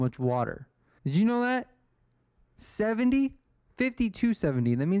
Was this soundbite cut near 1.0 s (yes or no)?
yes